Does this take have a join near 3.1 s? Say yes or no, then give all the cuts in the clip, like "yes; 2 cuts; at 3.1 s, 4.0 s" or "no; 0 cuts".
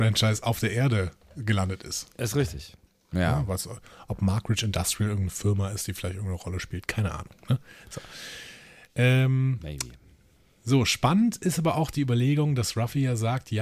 yes; 1 cut; at 3.1 s